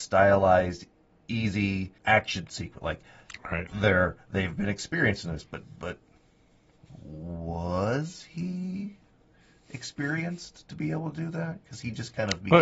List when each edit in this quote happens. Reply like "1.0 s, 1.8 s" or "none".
2.0 s